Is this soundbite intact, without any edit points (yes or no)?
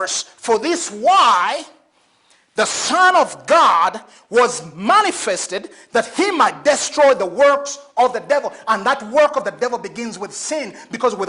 yes